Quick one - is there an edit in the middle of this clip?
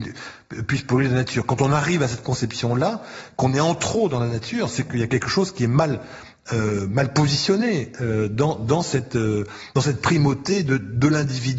no; 0 cuts

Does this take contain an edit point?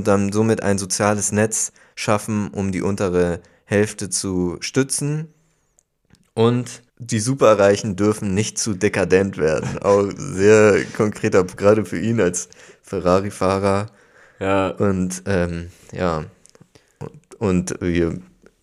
yes; 1 cut; at 6.9 s

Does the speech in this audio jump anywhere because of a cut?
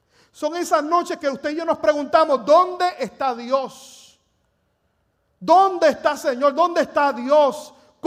no; 0 cuts

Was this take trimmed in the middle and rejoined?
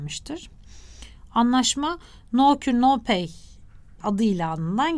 no; 0 cuts

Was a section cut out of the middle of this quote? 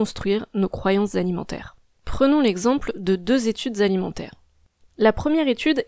no; 0 cuts

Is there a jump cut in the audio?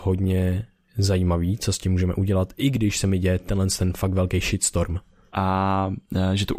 yes; 1 cut; at 5.3 s

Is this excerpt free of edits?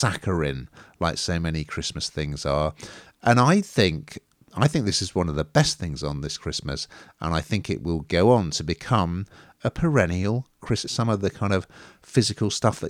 no; 1 cut; at 10.8 s

